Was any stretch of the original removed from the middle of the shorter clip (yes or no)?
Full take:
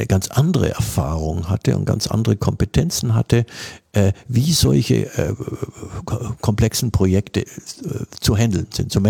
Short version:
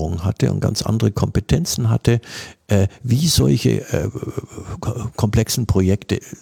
no